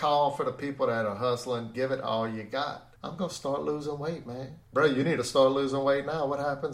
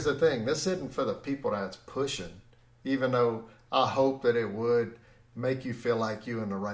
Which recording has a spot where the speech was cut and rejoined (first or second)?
first